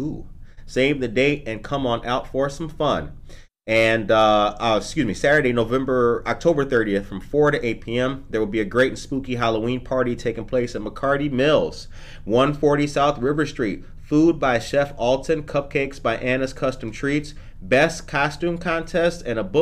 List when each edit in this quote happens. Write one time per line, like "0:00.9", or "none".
none